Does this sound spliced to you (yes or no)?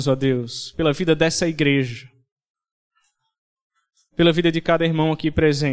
no